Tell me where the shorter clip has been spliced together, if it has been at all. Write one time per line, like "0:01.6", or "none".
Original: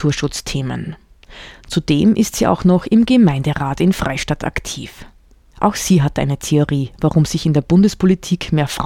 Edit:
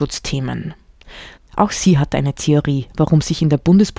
0:01.4